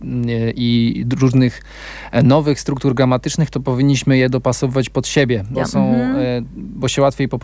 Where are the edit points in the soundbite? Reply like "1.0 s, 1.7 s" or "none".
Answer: 5.5 s